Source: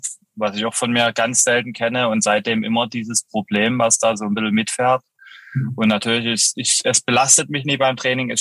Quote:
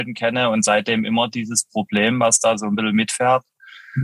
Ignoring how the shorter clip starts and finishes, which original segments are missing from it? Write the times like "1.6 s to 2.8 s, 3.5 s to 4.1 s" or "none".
none